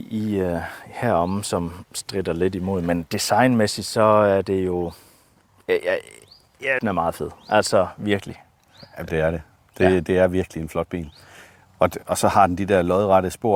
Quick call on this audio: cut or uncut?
cut